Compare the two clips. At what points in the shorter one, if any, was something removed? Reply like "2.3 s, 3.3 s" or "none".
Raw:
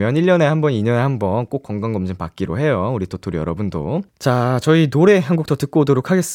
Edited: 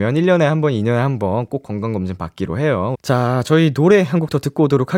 2.9 s